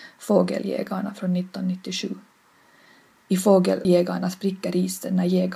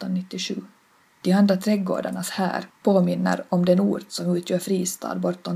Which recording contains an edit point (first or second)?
second